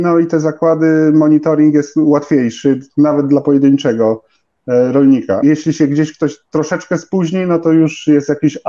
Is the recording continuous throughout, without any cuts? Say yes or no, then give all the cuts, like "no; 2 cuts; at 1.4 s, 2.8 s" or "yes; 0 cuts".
no; 1 cut; at 5.4 s